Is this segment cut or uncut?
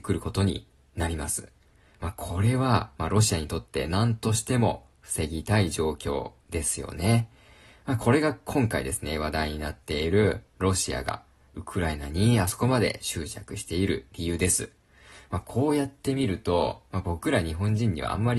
uncut